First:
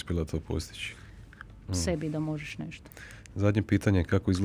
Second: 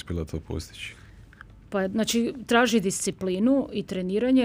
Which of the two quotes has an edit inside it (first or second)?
first